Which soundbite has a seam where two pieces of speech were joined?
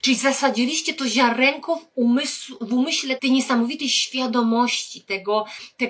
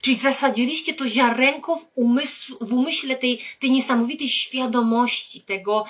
first; 1 cut; at 3.2 s

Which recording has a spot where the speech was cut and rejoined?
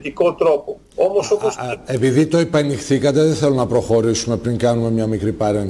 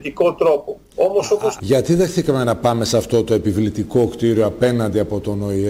second; 1 cut; at 1.6 s

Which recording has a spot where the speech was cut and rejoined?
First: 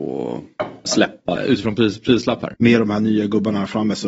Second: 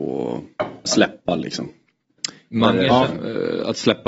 first; 2 cuts; at 1.4 s, 2.5 s

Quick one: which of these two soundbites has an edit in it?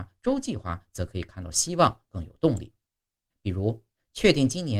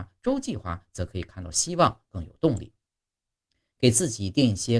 first; 1 cut; at 3.3 s

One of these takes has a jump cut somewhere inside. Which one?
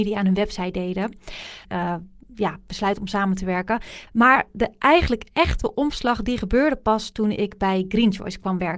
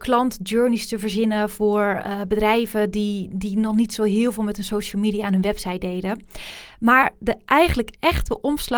first; 2 cuts; at 1.6 s, 4.1 s

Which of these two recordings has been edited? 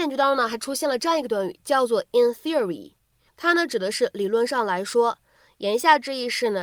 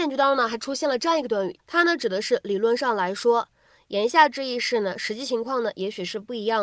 second; 1 cut; at 1.6 s

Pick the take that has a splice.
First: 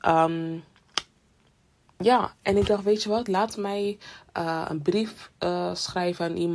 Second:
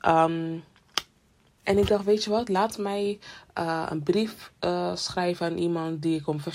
second; 1 cut; at 1.6 s

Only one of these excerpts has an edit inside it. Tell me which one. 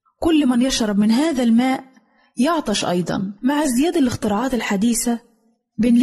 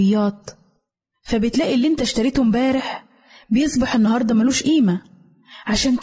first; 1 cut; at 3.4 s

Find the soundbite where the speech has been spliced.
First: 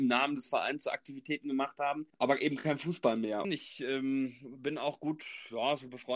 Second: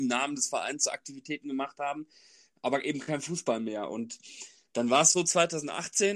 first; 2 cuts; at 2.1 s, 3.4 s

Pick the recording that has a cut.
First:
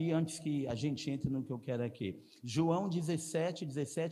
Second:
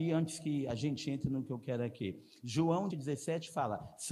second; 1 cut; at 2.9 s

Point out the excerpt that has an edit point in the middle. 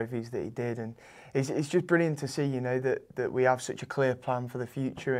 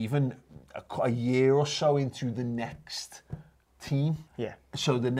second; 1 cut; at 4.3 s

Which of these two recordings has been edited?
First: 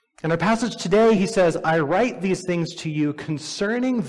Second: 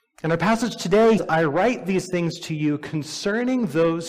second; 1 cut; at 1.2 s

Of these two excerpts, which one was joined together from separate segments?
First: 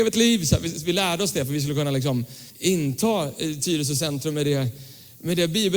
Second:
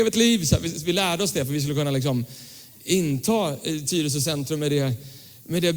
first; 1 cut; at 2.5 s

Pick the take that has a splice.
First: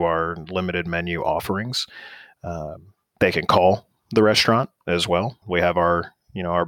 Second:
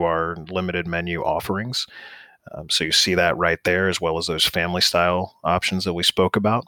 first; 2 cuts; at 2.3 s, 5.4 s

